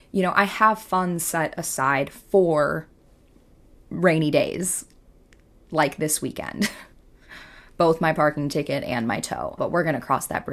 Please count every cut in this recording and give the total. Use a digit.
1